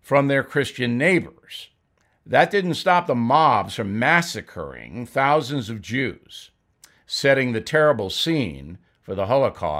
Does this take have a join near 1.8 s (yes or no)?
no